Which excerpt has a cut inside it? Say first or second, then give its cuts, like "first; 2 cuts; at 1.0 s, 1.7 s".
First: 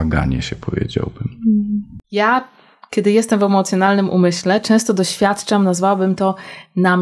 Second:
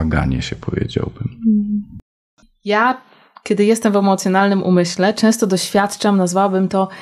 first; 1 cut; at 2.0 s